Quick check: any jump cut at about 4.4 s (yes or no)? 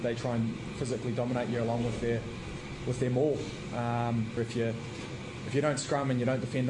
yes